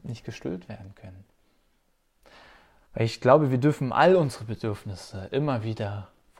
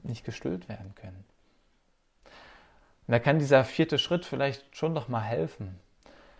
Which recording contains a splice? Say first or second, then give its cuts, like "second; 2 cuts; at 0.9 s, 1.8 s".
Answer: first; 1 cut; at 2.9 s